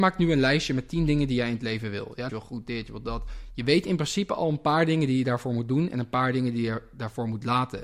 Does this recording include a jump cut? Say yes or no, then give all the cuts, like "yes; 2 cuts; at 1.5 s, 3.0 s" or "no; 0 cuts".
yes; 1 cut; at 2.3 s